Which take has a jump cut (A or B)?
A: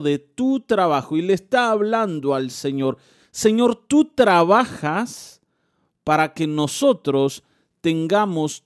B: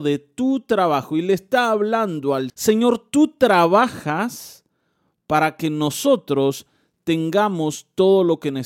B